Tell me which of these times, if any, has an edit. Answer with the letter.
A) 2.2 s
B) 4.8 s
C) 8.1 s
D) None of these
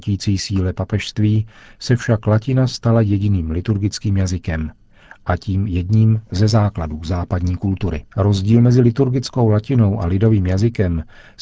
C